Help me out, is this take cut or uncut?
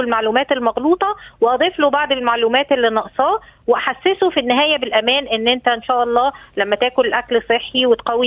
uncut